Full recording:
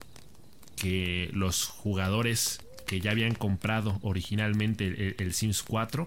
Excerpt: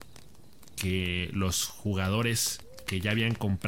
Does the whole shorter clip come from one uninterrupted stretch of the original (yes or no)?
yes